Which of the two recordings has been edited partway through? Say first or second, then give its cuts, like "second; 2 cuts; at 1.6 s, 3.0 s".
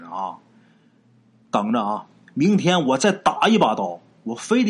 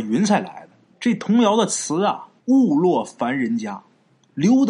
second; 2 cuts; at 0.9 s, 2.4 s